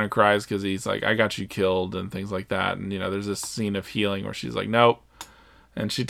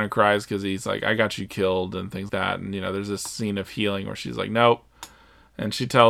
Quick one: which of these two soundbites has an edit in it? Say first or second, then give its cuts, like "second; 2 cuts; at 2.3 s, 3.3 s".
second; 1 cut; at 2.3 s